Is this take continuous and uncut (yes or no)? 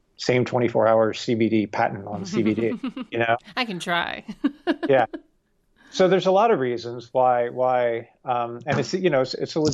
yes